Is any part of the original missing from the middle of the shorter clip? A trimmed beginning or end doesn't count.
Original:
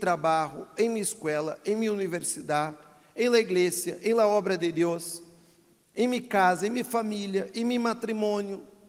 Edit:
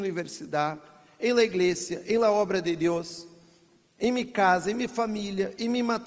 no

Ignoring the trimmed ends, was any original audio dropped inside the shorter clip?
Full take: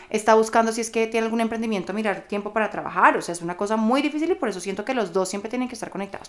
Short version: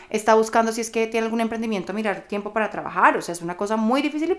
no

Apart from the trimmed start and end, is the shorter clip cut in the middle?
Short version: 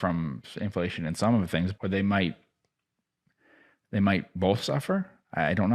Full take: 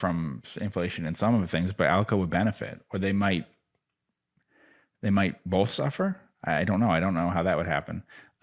yes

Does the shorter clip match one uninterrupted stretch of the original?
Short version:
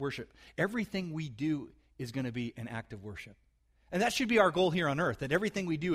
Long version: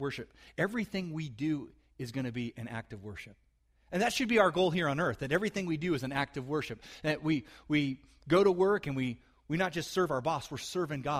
yes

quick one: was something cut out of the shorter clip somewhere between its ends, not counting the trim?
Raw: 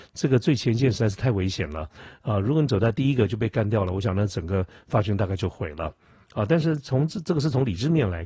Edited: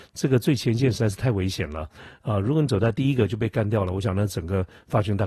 no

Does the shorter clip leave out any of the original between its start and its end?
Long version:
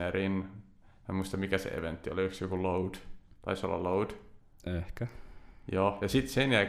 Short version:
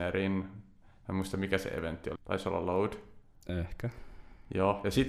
yes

